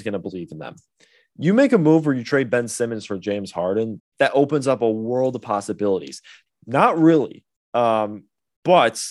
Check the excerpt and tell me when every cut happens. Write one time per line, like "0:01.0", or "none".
0:04.0
0:06.5